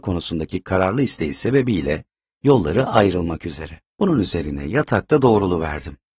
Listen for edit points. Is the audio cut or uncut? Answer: cut